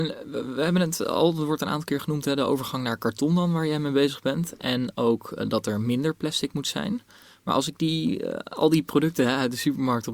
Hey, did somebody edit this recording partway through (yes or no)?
no